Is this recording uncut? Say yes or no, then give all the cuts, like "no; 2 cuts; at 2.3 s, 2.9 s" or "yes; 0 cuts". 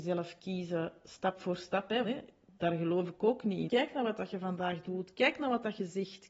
no; 2 cuts; at 2.0 s, 3.7 s